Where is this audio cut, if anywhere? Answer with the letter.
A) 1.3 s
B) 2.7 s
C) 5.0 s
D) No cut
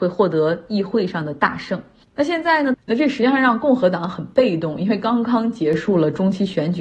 B